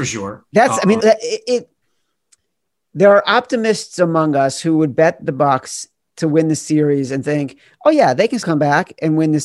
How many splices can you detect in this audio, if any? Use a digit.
2